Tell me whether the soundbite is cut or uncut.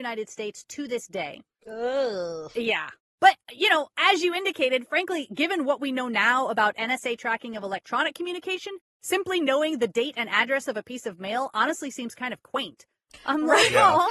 uncut